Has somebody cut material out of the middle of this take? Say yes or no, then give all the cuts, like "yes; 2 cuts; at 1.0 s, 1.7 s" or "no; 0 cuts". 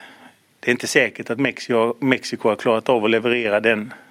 no; 0 cuts